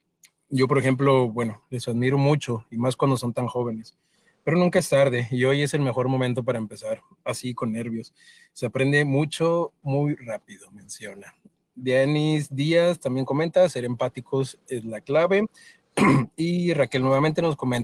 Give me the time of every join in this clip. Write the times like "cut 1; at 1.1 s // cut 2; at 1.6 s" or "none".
cut 1; at 1.6 s